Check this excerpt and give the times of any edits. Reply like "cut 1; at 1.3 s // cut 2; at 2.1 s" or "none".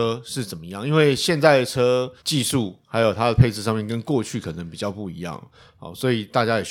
cut 1; at 2.2 s